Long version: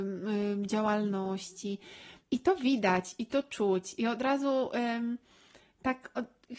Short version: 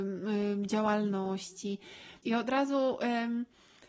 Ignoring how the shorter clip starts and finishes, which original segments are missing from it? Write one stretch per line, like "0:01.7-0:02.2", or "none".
0:02.2-0:03.9